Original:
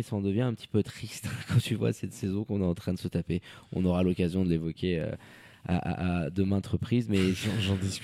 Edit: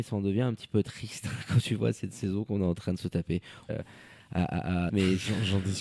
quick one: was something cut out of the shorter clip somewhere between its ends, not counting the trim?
yes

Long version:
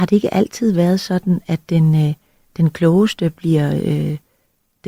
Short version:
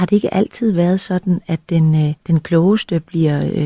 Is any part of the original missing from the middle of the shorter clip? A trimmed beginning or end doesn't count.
yes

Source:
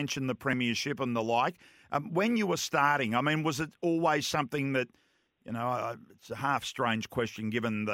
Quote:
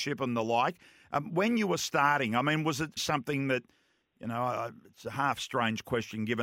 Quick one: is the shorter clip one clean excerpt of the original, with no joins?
no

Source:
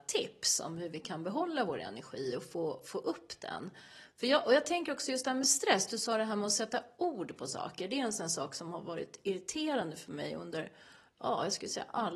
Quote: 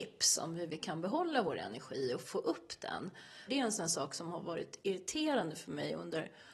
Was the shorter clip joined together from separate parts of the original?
yes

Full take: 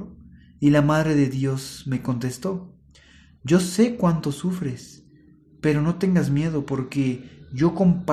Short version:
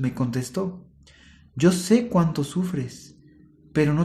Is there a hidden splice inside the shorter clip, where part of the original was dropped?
no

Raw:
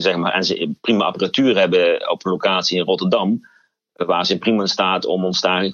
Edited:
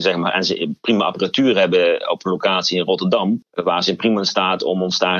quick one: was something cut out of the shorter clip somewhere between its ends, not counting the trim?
yes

